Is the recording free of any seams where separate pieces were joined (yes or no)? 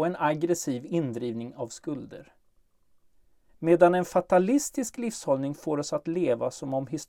no